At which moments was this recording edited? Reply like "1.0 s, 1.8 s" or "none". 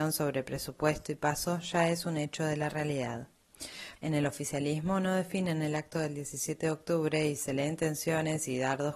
4.0 s